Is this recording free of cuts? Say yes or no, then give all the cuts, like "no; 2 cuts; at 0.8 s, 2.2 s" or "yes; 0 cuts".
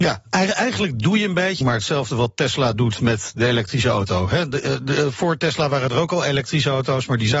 no; 1 cut; at 1.6 s